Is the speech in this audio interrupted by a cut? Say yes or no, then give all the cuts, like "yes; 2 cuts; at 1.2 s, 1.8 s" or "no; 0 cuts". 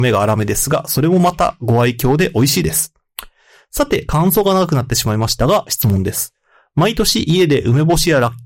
no; 0 cuts